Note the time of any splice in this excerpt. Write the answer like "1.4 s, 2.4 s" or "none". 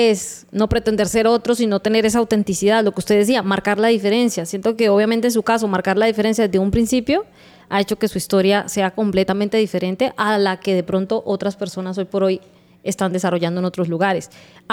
none